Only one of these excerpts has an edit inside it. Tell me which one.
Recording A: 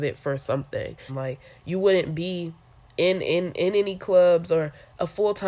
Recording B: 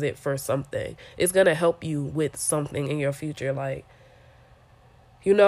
A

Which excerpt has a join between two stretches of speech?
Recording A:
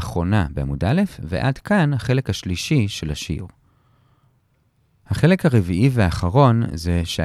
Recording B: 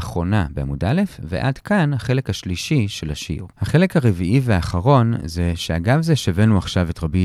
B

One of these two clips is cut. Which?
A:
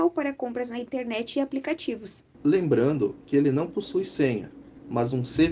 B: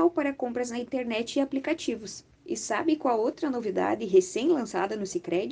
B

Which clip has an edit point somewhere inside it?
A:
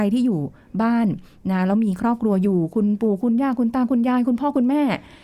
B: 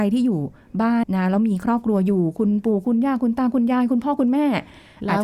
B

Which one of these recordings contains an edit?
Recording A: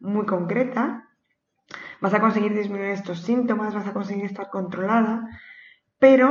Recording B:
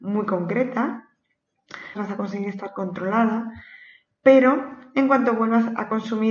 B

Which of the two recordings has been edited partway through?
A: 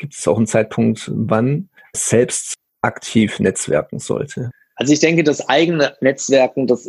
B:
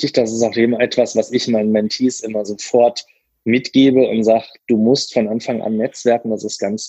A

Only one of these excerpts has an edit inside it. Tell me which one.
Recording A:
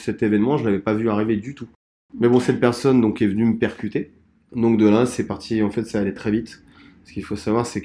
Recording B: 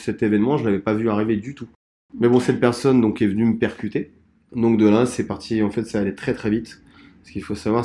A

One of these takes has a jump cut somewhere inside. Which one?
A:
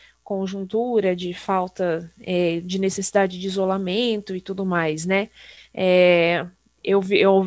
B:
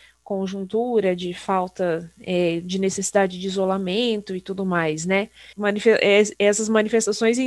B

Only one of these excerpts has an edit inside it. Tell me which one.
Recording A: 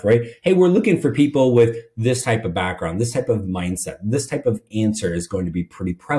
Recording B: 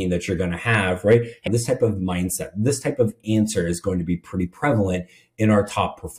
B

